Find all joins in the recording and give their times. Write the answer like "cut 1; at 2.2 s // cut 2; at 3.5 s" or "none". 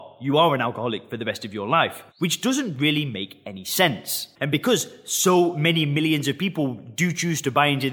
cut 1; at 2.1 s // cut 2; at 4.4 s